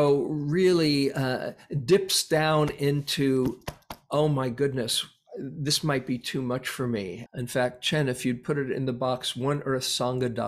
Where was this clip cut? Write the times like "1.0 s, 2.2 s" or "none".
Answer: 7.3 s

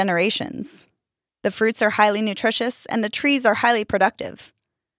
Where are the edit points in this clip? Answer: 1.3 s

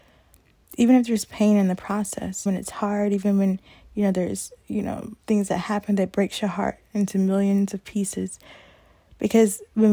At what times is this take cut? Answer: 2.5 s, 5.2 s

